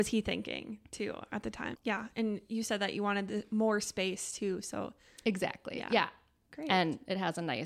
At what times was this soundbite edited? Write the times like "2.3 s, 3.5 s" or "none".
1.8 s